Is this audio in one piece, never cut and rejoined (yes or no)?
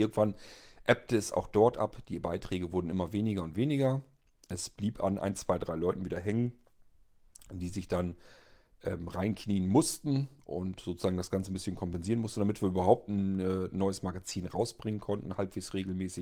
yes